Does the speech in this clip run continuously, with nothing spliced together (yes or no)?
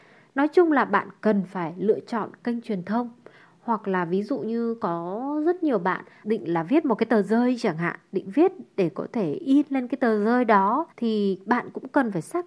no